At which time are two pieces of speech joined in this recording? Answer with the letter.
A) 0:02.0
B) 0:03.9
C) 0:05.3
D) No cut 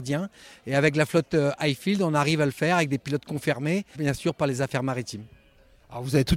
B